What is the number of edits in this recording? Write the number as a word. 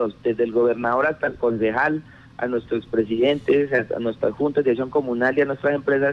zero